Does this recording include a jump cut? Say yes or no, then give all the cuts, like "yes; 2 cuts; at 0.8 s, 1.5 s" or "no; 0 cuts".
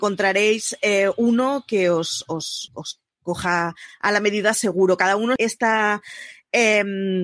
yes; 2 cuts; at 2.7 s, 5.4 s